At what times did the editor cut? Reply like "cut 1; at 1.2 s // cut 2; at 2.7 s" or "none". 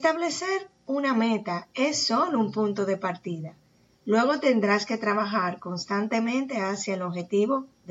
none